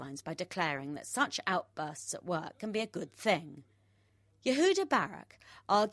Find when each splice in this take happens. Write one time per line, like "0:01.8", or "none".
none